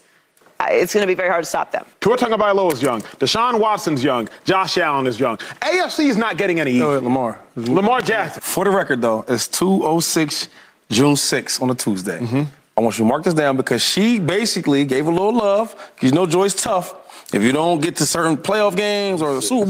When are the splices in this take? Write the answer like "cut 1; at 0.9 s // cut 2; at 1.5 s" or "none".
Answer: cut 1; at 1.9 s // cut 2; at 8.4 s